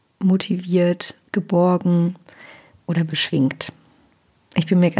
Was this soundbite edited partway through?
no; 0 cuts

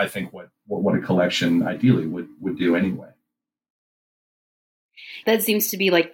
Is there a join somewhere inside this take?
yes; 1 cut; at 5.2 s

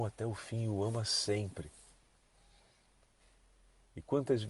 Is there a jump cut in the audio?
no; 0 cuts

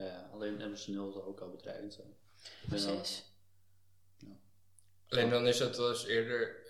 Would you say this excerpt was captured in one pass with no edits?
no; 1 cut; at 2.7 s

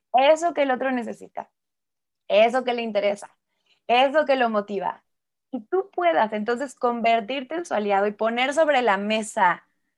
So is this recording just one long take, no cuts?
yes; 0 cuts

